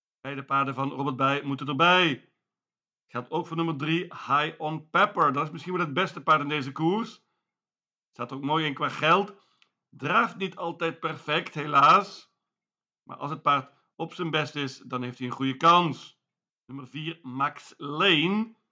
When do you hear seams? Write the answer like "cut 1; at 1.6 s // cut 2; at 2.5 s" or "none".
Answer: none